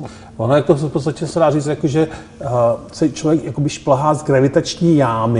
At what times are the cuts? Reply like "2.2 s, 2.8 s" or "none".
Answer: none